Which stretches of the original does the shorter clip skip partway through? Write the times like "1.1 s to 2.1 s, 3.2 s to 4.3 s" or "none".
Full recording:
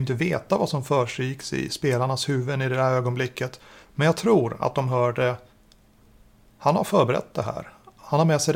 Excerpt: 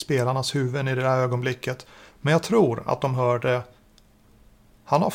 none